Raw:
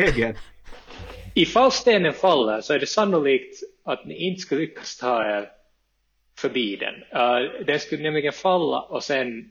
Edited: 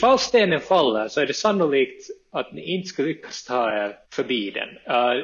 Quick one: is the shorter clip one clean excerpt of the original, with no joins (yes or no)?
no